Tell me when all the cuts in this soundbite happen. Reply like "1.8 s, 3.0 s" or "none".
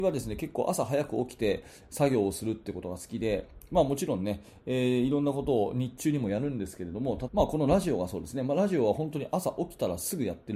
7.3 s